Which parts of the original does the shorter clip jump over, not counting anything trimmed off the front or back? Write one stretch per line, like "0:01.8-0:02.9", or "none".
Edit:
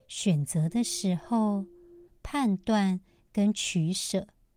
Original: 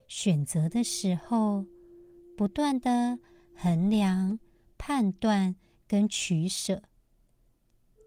0:02.1-0:04.6